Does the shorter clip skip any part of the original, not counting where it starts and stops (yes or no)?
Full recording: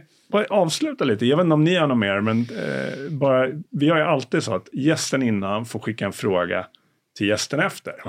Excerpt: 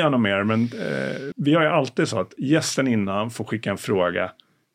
yes